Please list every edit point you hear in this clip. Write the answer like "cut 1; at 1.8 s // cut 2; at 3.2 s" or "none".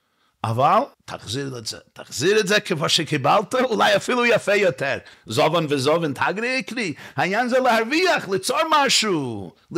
cut 1; at 0.9 s // cut 2; at 5.1 s